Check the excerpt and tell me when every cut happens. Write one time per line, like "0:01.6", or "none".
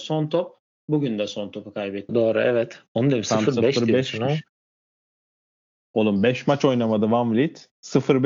0:02.1